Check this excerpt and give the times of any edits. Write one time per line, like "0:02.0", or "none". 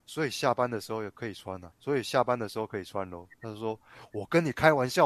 0:01.7